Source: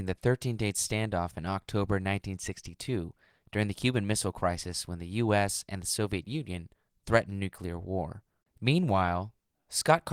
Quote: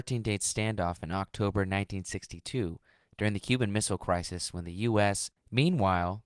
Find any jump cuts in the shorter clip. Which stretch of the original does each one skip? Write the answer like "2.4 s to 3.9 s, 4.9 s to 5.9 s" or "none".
5.7 s to 8.4 s